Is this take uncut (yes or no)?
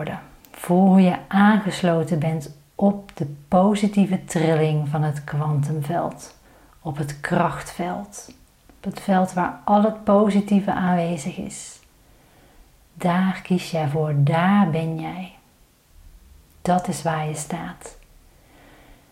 no